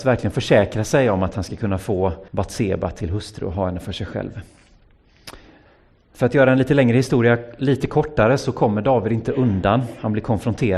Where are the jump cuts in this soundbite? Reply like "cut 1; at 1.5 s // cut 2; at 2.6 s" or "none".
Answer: cut 1; at 2.3 s